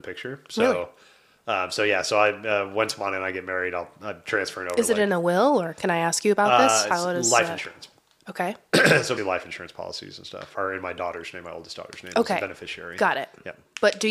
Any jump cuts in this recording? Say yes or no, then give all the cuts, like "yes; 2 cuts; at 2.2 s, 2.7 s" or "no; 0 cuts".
yes; 2 cuts; at 9.2 s, 10.5 s